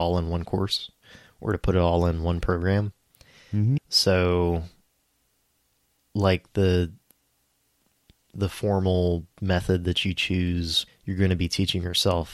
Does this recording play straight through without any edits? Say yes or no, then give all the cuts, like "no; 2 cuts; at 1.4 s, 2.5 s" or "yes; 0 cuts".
no; 2 cuts; at 3.8 s, 10.9 s